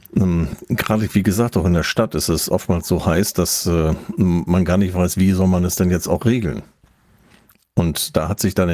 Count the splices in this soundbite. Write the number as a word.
zero